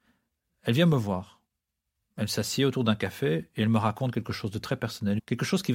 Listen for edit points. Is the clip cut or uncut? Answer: uncut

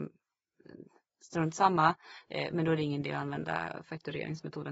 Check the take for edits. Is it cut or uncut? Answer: uncut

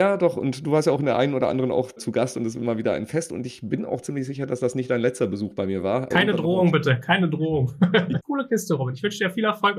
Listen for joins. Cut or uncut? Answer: cut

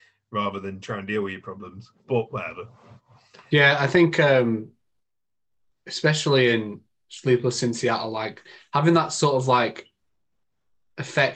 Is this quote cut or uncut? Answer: uncut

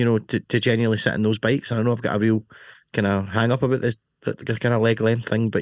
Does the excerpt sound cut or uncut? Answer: uncut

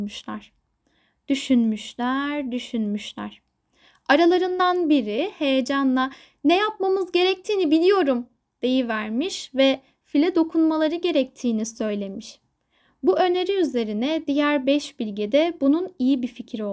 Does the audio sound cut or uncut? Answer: uncut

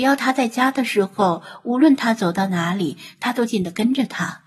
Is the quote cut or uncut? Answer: cut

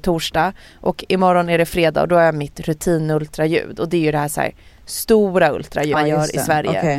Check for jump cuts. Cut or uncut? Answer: cut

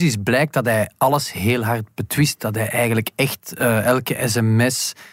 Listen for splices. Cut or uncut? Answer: uncut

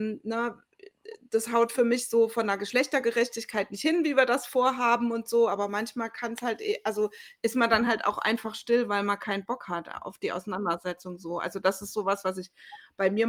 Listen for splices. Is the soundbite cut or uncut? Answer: uncut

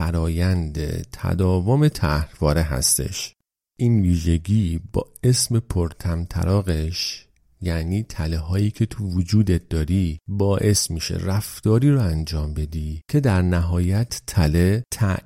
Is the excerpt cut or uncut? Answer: uncut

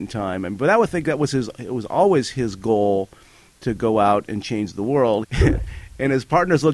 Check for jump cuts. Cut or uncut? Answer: cut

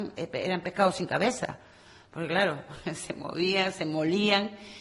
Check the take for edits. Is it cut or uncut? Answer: uncut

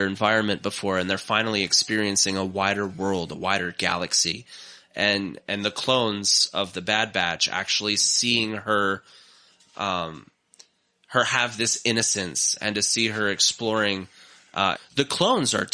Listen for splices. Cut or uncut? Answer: cut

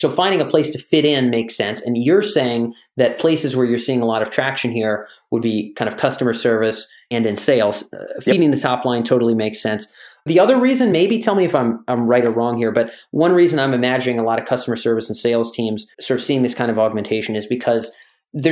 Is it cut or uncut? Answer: uncut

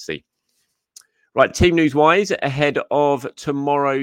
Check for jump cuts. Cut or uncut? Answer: uncut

